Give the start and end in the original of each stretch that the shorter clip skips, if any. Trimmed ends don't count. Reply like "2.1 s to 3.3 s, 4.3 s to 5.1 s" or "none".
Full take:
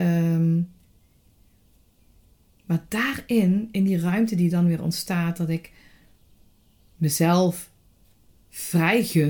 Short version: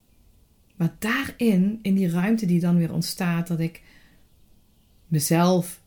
none